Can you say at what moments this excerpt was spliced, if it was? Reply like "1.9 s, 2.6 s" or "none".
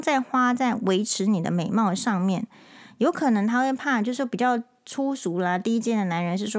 none